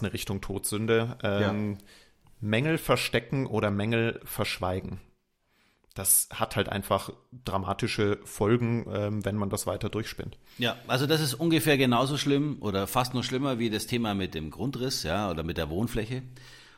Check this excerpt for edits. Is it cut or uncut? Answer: uncut